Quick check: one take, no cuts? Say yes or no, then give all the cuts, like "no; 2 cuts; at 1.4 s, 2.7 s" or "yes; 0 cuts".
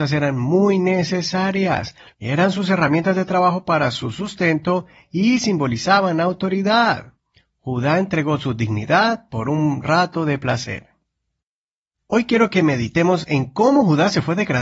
no; 1 cut; at 2.1 s